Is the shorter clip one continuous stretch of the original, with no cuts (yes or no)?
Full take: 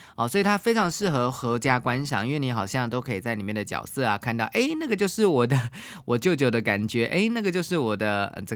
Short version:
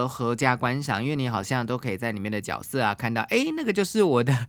yes